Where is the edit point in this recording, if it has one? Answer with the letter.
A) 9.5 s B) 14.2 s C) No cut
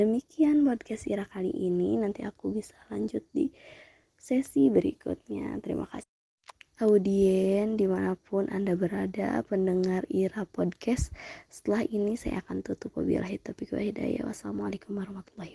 C